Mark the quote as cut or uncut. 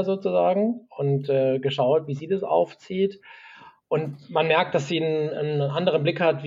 uncut